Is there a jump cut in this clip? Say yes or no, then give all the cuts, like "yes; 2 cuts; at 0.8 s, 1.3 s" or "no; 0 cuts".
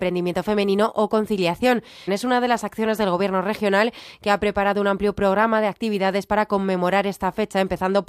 yes; 1 cut; at 2.1 s